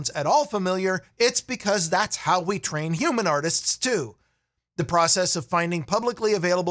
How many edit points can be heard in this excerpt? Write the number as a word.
zero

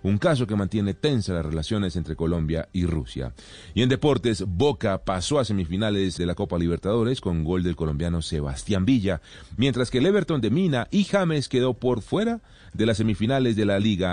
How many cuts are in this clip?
one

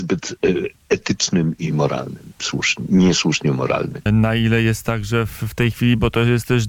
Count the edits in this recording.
two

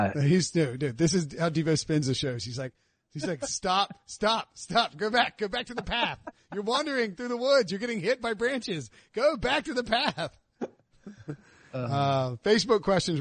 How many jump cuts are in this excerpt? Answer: zero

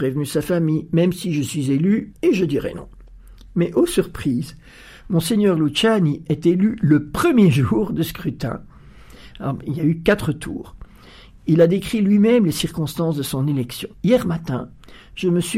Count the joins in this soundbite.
two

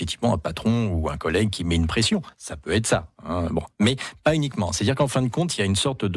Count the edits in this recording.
zero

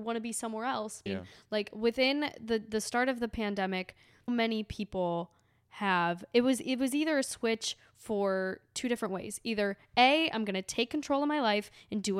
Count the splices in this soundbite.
two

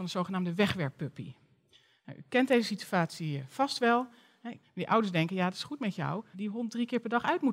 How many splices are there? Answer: two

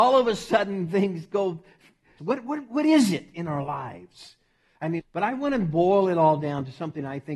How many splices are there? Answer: two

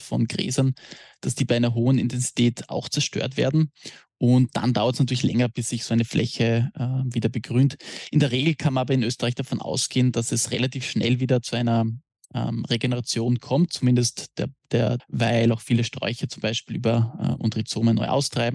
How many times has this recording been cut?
two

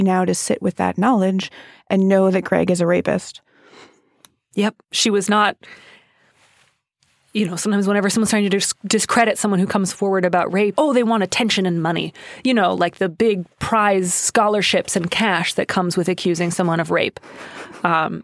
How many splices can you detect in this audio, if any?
one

